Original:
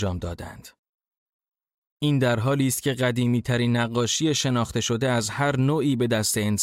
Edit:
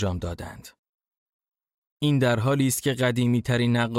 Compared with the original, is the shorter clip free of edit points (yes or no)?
yes